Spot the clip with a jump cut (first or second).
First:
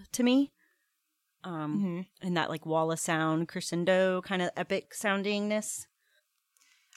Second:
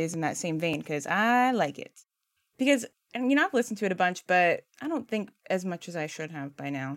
second